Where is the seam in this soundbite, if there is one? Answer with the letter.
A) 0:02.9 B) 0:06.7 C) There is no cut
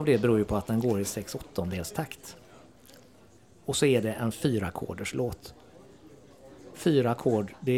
C